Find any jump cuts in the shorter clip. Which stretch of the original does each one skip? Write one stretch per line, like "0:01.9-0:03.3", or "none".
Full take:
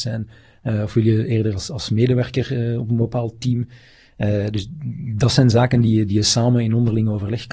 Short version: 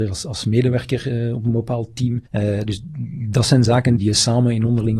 0:03.7-0:04.1
0:05.8-0:06.1

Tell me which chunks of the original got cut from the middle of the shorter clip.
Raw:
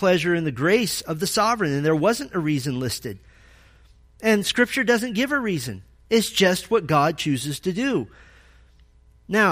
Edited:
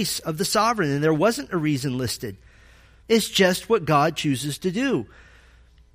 0:03.8-0:06.0

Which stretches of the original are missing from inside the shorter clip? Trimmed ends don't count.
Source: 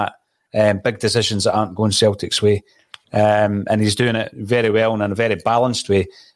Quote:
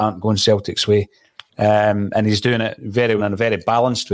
0:04.7-0:05.0

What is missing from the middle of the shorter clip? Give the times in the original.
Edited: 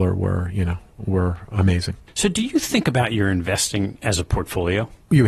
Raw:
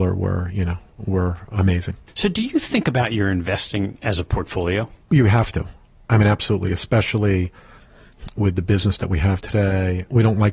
none

